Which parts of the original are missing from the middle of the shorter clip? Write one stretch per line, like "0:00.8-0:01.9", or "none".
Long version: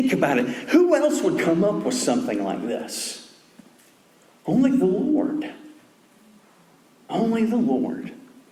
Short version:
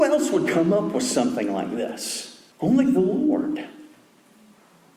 0:03.4-0:04.4